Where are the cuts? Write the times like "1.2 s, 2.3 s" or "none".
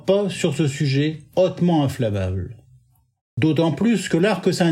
none